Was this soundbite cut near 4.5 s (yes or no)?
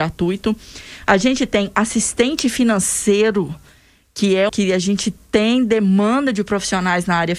yes